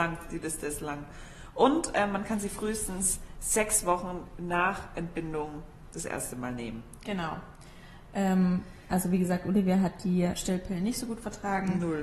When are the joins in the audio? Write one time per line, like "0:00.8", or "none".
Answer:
none